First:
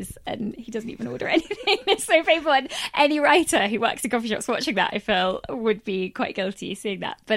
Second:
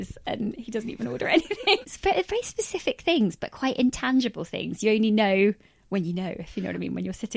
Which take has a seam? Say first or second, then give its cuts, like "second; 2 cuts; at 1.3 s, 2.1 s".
second; 1 cut; at 1.8 s